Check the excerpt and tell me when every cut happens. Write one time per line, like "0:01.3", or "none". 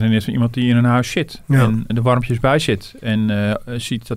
0:01.9